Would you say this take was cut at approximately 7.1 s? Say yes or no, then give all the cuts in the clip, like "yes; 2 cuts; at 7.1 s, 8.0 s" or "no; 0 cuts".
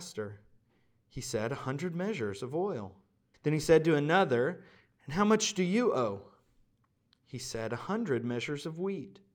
no; 1 cut; at 3.3 s